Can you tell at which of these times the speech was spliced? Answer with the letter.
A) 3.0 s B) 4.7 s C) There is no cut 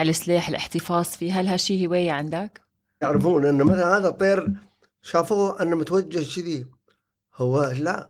A